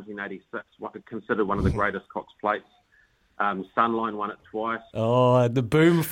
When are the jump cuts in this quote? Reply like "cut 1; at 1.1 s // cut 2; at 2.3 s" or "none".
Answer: cut 1; at 4.9 s

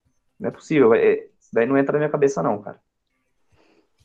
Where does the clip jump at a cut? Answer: cut 1; at 1.4 s

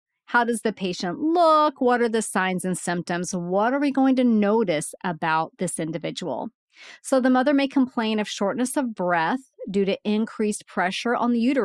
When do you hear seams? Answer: none

